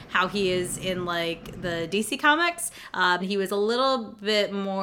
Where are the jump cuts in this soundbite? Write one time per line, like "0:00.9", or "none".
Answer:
0:03.2